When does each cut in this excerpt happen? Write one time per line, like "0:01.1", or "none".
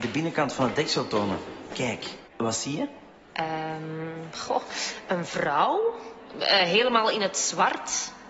0:02.3